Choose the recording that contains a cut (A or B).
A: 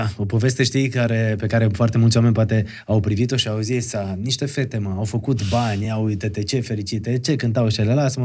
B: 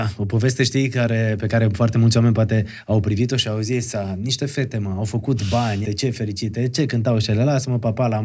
B